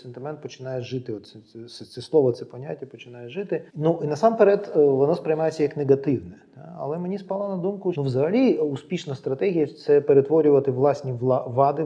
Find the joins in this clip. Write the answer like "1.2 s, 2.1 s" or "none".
3.7 s, 7.9 s

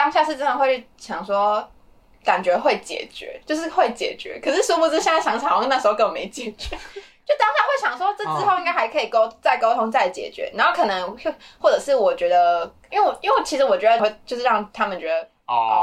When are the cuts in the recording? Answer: 12.9 s, 14.0 s

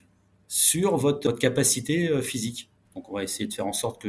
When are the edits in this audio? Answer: 2.8 s

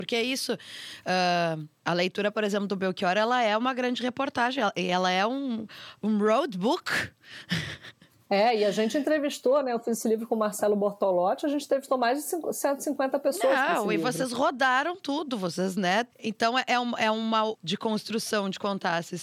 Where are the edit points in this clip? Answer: 16.1 s, 17.5 s

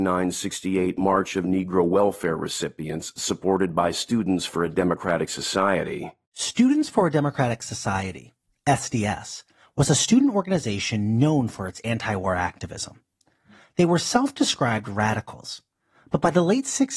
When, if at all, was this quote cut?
none

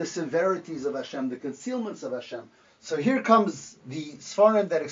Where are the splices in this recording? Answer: 2.6 s

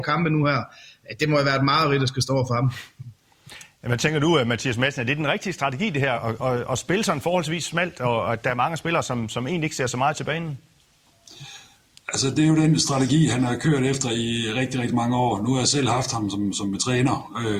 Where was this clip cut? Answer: none

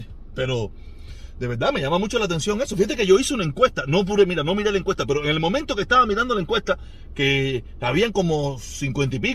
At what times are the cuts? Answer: none

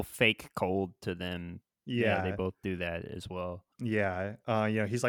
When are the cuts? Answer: 3.7 s

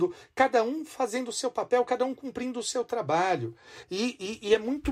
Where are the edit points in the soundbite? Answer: 3.8 s

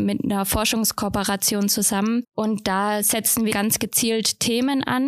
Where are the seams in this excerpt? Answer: 2.2 s, 3.5 s

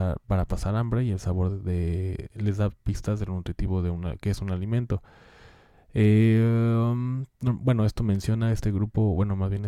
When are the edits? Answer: none

